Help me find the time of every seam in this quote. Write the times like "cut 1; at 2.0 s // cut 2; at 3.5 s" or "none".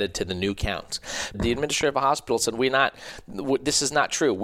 cut 1; at 1.3 s